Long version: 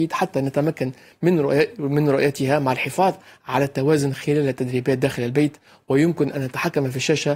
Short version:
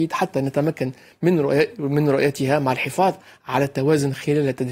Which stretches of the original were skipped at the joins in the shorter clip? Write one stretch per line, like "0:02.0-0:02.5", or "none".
none